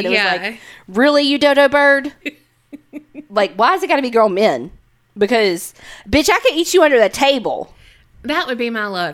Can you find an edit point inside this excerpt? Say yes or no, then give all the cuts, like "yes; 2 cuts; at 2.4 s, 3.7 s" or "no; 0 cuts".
yes; 1 cut; at 2.2 s